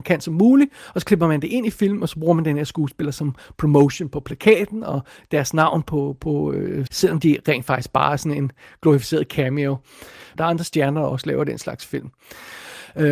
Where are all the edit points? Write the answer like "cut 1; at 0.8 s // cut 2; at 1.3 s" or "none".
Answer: cut 1; at 6.9 s // cut 2; at 10.4 s